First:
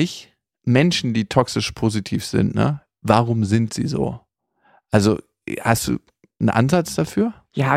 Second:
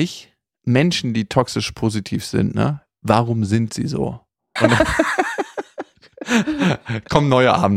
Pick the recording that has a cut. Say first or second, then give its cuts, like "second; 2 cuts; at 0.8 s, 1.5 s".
second; 1 cut; at 4.6 s